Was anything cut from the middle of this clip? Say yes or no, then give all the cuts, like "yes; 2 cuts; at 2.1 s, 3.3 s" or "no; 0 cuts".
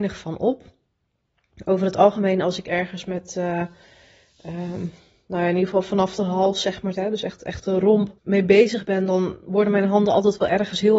yes; 2 cuts; at 6.9 s, 8.2 s